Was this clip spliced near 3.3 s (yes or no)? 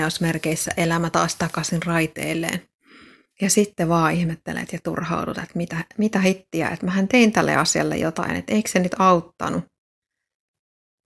yes